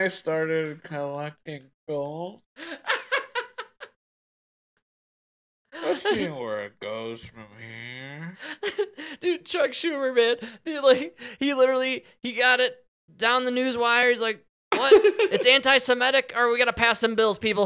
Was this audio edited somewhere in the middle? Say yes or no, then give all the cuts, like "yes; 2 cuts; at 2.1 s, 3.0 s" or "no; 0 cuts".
no; 0 cuts